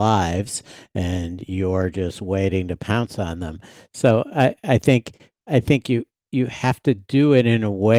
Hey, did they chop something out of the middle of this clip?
no; 0 cuts

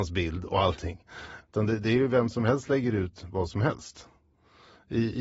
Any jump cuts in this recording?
yes; 1 cut; at 1.4 s

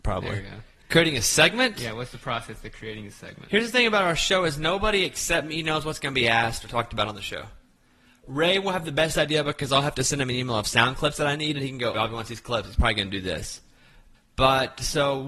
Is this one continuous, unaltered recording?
no; 2 cuts; at 11.9 s, 14.1 s

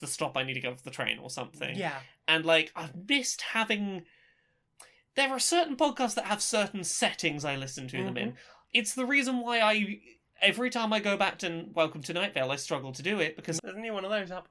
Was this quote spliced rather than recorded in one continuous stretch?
yes; 1 cut; at 13.6 s

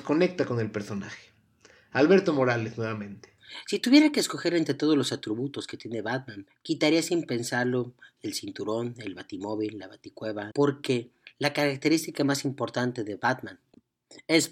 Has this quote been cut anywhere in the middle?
yes; 1 cut; at 10.5 s

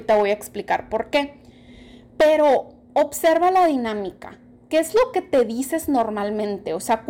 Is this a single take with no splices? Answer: yes; 0 cuts

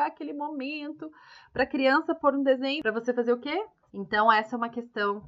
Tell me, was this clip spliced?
yes; 1 cut; at 3.9 s

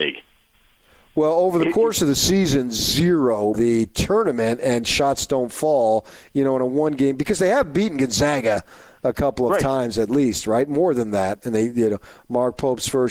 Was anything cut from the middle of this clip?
yes; 1 cut; at 3.5 s

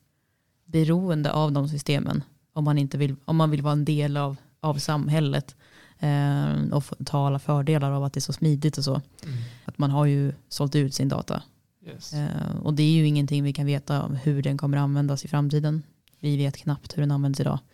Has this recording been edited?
yes; 1 cut; at 9.6 s

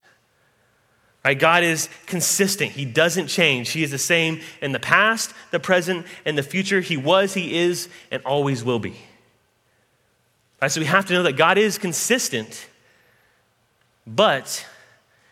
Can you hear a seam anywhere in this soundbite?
no; 0 cuts

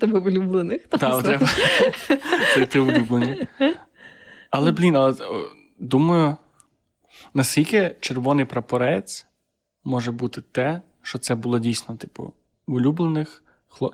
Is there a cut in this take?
no; 0 cuts

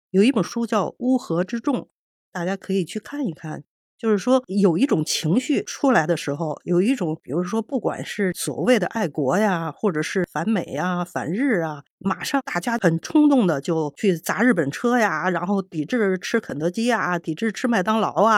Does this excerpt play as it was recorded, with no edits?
yes; 0 cuts

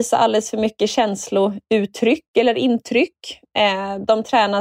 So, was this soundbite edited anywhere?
no; 0 cuts

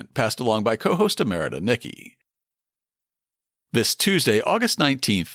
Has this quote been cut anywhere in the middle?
no; 0 cuts

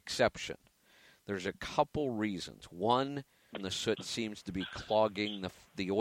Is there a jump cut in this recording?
yes; 1 cut; at 3.5 s

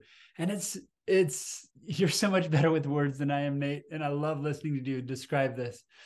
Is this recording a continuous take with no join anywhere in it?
yes; 0 cuts

